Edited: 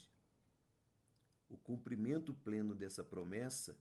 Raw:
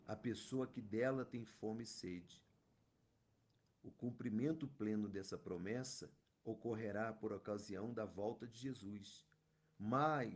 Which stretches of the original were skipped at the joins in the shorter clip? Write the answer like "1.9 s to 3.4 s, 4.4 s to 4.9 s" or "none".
none